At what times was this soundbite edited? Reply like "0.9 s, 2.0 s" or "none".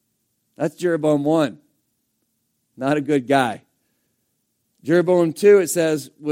none